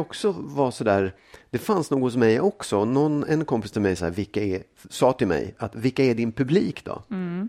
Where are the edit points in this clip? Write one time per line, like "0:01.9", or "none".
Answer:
0:04.0